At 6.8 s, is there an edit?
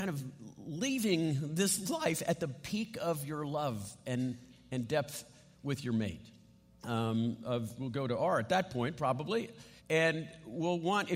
yes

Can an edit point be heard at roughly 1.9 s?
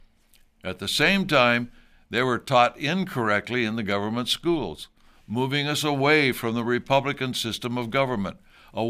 no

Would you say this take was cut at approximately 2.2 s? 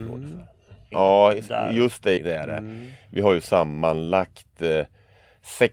yes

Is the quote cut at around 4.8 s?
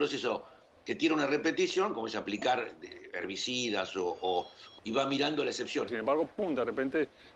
yes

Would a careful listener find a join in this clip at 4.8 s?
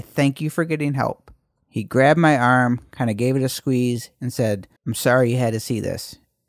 yes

